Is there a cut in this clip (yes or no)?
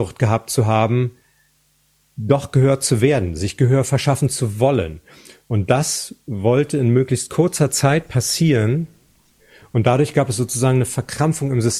no